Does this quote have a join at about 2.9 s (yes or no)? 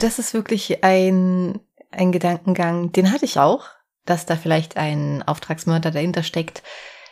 no